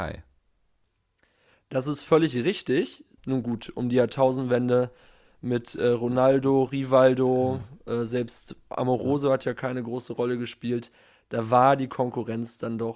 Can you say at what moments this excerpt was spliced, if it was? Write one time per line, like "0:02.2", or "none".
0:03.2